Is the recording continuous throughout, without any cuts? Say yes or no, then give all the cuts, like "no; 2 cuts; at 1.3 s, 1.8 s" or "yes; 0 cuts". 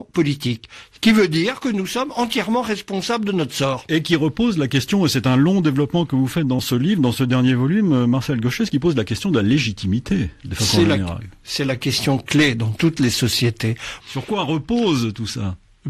no; 1 cut; at 14.0 s